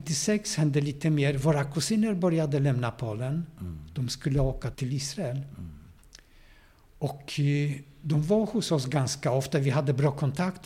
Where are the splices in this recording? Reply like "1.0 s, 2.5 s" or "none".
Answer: 4.7 s